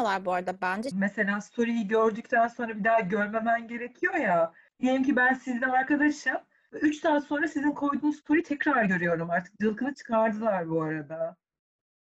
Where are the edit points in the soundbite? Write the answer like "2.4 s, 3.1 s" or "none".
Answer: 0.9 s

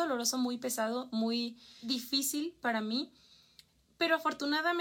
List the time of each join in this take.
none

